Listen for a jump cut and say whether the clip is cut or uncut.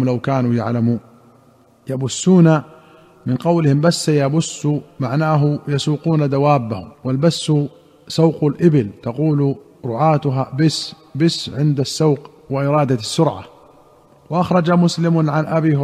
cut